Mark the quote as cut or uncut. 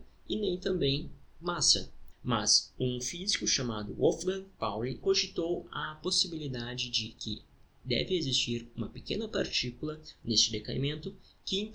cut